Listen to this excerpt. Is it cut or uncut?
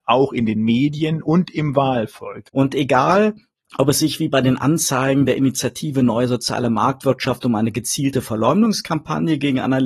cut